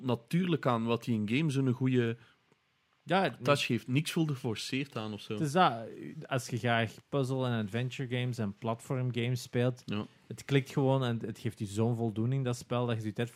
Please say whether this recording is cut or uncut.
uncut